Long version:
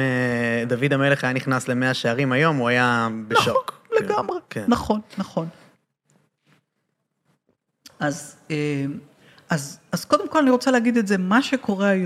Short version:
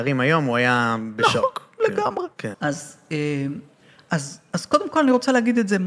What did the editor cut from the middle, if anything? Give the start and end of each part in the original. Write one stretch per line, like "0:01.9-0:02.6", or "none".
0:04.7-0:07.9

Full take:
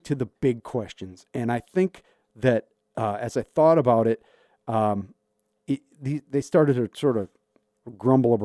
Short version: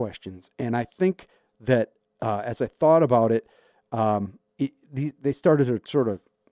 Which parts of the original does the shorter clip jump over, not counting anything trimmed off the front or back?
0:05.2-0:05.6

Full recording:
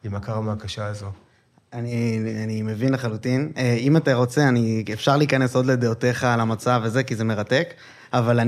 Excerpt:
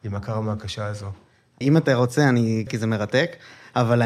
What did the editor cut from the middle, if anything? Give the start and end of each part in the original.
0:01.6-0:03.8
0:04.9-0:07.0

